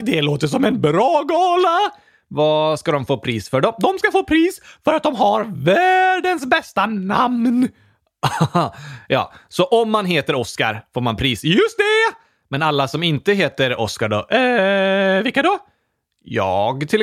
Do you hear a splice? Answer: no; 0 cuts

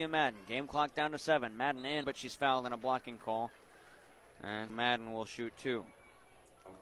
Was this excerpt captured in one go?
no; 2 cuts; at 2.0 s, 4.7 s

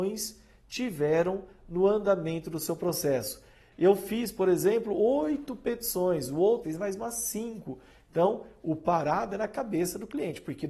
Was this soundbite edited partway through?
yes; 1 cut; at 6.6 s

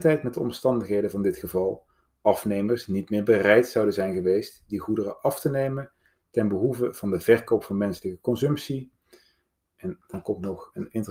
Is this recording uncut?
yes; 0 cuts

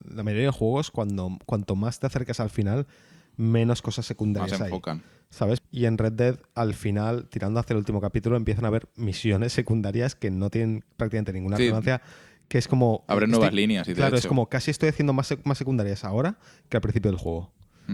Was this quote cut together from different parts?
yes; 1 cut; at 5.6 s

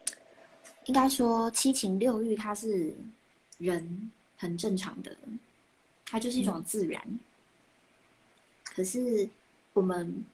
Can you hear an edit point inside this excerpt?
no; 0 cuts

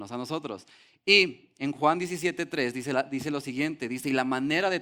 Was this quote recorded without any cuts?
yes; 0 cuts

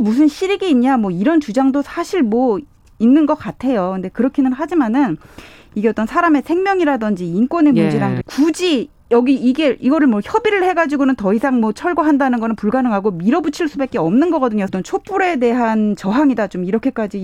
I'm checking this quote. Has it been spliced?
yes; 2 cuts; at 8.2 s, 14.7 s

